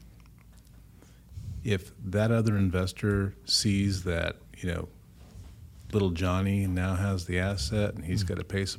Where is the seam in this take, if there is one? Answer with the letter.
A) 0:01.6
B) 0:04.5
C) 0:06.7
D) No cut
B